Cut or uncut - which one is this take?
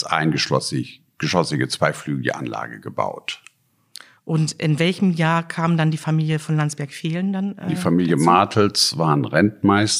uncut